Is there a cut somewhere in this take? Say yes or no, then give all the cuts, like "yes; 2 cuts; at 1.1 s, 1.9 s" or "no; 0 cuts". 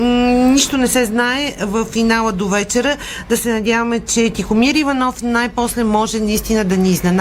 no; 0 cuts